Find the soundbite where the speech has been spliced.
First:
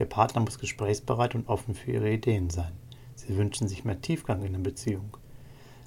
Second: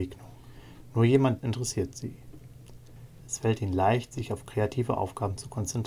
second; 2 cuts; at 1.4 s, 3.2 s

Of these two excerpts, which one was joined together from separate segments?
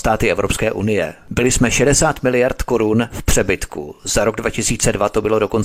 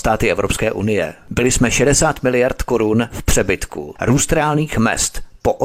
second; 1 cut; at 4.0 s

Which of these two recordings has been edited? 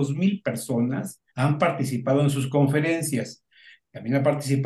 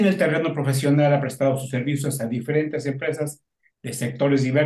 first; 1 cut; at 1.3 s

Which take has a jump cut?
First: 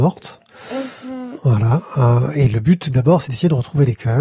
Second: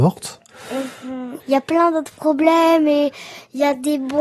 second; 1 cut; at 1.4 s

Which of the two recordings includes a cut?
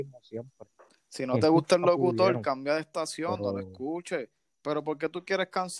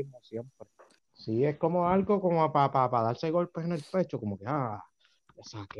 second; 1 cut; at 1.0 s

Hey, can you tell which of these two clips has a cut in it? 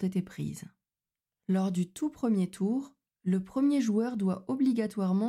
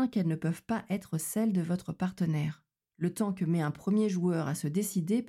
second; 1 cut; at 2.8 s

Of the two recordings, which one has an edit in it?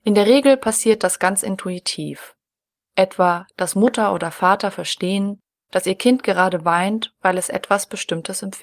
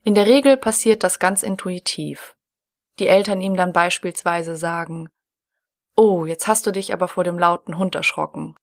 second; 1 cut; at 2.8 s

